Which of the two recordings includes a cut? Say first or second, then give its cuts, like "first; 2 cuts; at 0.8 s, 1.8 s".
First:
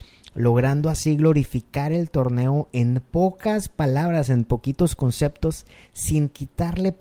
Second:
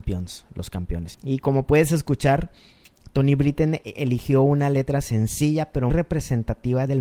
second; 2 cuts; at 1.1 s, 5.9 s